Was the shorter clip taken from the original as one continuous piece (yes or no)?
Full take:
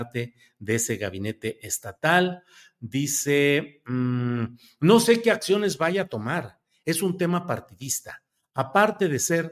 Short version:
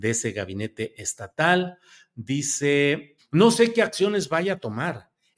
no